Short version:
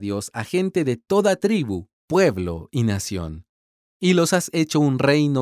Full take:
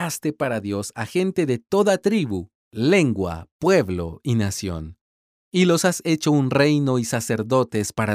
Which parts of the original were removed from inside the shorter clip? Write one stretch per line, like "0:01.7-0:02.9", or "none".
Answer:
0:02.6-0:03.5